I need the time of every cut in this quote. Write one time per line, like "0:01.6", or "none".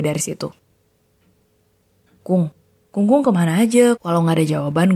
0:04.0